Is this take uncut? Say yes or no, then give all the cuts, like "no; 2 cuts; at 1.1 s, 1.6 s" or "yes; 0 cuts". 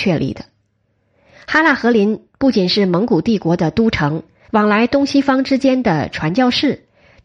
no; 1 cut; at 4.4 s